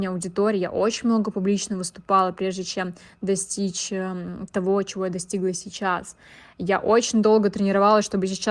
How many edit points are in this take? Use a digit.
0